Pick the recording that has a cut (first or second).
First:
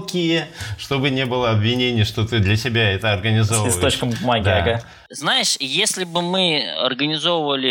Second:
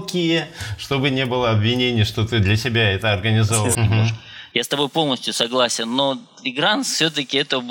second